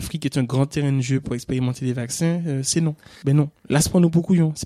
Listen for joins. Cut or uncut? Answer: cut